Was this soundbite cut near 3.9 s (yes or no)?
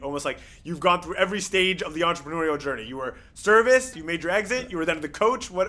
yes